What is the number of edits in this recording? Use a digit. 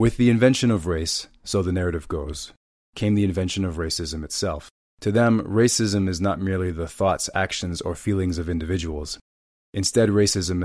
1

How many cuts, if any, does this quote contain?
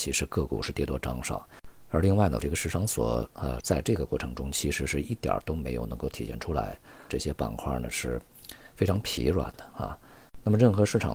3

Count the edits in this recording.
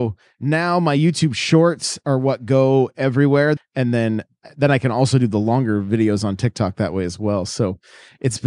1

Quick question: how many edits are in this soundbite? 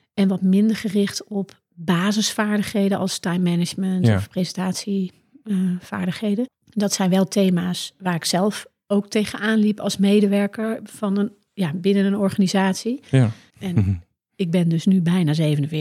2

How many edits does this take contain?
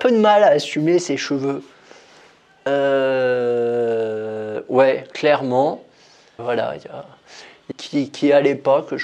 2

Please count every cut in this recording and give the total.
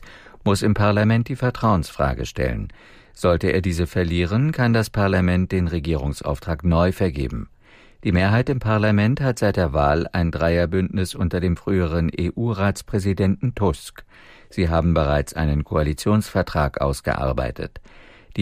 0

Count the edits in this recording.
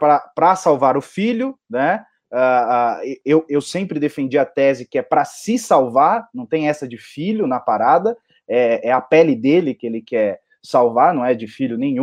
0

